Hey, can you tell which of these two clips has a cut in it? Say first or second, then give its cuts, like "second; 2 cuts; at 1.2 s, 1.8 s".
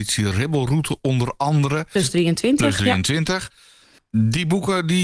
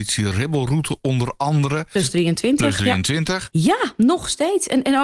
second; 1 cut; at 3.5 s